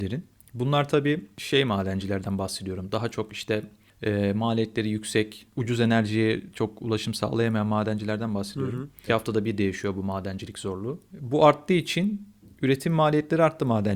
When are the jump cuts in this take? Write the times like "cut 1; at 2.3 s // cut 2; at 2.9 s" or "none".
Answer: cut 1; at 5.5 s // cut 2; at 9.1 s